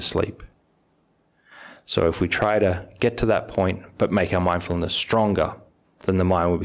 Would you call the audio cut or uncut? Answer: uncut